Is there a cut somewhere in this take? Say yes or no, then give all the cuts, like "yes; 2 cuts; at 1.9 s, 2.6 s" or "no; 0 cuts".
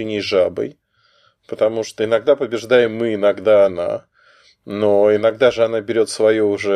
no; 0 cuts